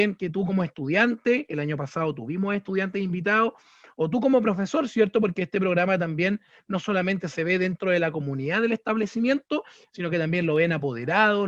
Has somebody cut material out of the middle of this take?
no; 0 cuts

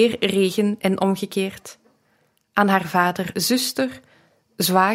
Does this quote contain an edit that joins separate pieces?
no; 0 cuts

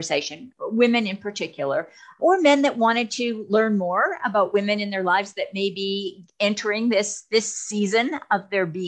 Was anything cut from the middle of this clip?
yes; 1 cut; at 2.2 s

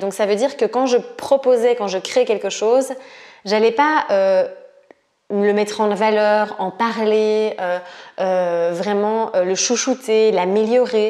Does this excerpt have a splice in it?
no; 0 cuts

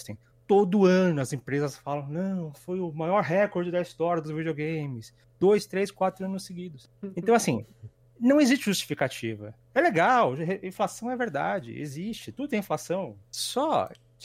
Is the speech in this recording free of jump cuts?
no; 1 cut; at 13.2 s

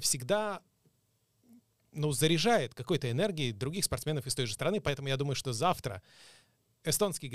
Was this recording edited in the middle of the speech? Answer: no; 0 cuts

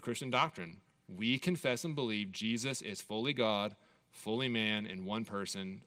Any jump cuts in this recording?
no; 0 cuts

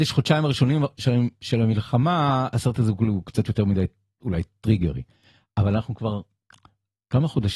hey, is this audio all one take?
yes; 0 cuts

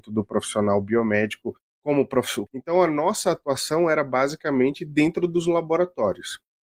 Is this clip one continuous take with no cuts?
no; 1 cut; at 2.5 s

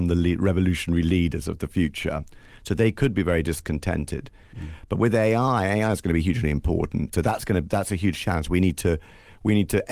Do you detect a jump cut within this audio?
yes; 2 cuts; at 4.5 s, 7.1 s

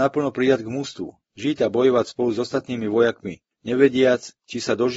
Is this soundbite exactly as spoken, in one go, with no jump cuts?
yes; 0 cuts

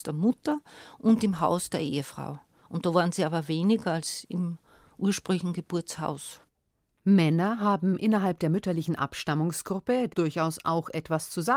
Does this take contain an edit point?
yes; 1 cut; at 10.1 s

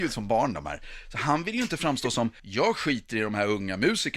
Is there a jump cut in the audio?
yes; 1 cut; at 2.4 s

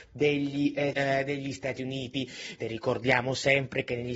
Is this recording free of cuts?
no; 2 cuts; at 0.9 s, 2.6 s

